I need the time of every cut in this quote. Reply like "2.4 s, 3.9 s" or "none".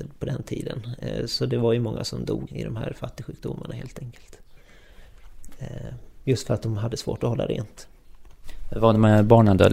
2.5 s